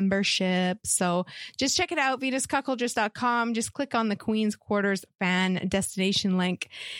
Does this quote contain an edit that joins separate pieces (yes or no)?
no